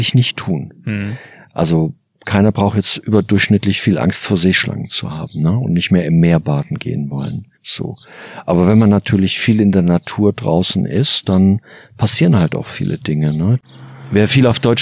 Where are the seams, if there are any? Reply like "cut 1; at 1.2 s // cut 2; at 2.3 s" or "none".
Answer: cut 1; at 7.5 s